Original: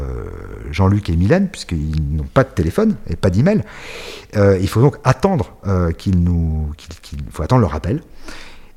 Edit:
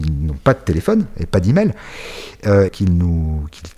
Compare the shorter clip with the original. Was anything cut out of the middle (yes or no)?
yes